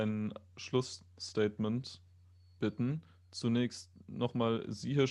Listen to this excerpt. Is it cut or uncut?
uncut